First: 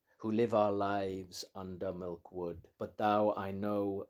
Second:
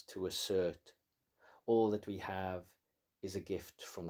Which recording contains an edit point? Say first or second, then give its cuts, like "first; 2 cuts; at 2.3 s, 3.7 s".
first; 1 cut; at 2.7 s